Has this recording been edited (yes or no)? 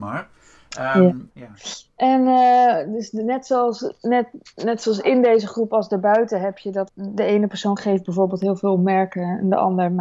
yes